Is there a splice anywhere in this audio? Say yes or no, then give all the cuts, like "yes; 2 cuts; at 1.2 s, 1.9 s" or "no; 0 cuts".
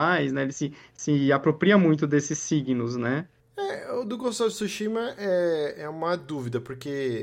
no; 0 cuts